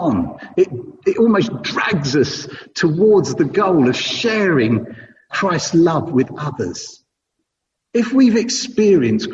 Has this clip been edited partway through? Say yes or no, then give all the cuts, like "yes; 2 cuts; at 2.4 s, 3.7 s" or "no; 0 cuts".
yes; 1 cut; at 5.3 s